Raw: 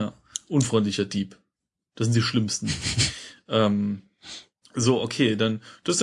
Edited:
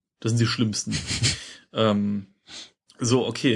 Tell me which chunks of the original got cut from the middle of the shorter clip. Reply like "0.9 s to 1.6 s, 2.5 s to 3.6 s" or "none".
none

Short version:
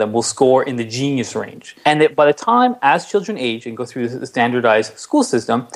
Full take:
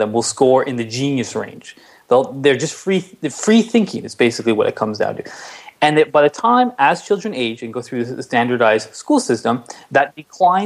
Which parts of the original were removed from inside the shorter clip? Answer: 1.8 s to 5.8 s

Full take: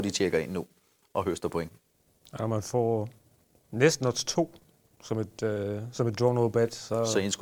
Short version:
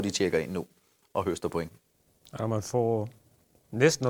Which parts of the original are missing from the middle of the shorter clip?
none

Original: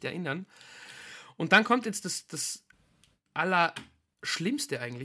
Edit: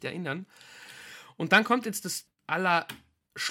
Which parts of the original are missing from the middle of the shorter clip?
2.3 s to 3.1 s

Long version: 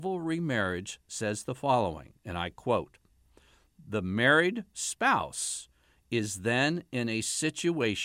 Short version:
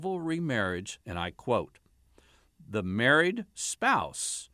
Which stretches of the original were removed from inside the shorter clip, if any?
1.0 s to 2.2 s

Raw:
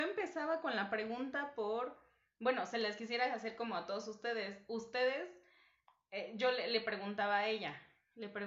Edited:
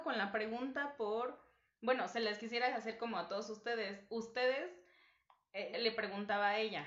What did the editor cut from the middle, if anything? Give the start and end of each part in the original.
6.3 s to 6.6 s

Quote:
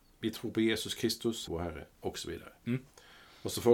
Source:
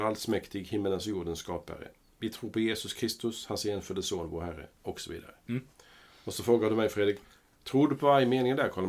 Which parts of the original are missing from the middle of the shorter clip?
3.5 s to 4.3 s

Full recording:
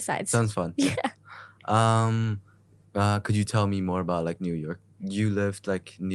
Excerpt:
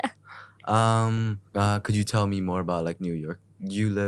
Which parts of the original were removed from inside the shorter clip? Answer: 2.5 s to 2.9 s

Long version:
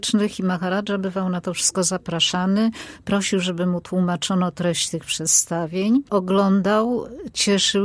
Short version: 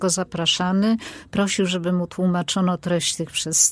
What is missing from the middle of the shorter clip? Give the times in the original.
none

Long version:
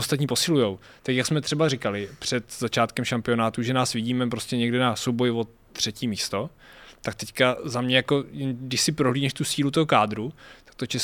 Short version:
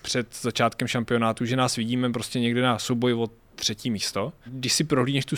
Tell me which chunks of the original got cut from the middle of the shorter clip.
6.6 s to 8.5 s

